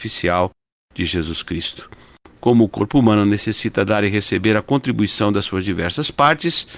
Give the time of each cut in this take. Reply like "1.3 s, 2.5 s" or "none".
2.2 s